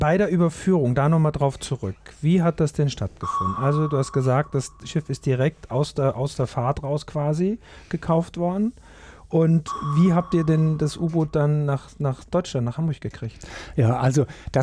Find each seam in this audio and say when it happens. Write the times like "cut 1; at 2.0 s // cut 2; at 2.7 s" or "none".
none